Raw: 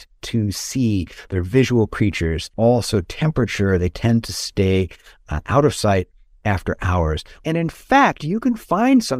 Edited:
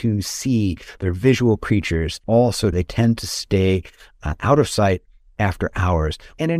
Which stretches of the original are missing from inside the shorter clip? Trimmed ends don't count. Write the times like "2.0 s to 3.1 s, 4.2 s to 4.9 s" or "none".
3.0 s to 3.8 s